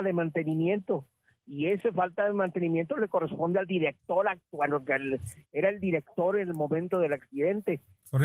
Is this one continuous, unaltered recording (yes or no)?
yes